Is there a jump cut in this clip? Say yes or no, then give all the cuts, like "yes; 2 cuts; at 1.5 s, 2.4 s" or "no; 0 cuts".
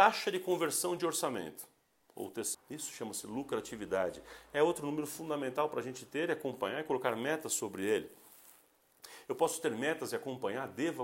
yes; 1 cut; at 2.5 s